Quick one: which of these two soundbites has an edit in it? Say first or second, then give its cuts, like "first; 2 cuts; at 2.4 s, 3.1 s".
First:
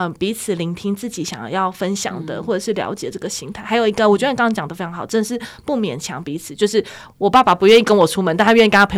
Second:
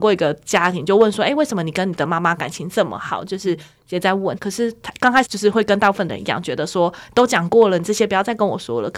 second; 1 cut; at 4.4 s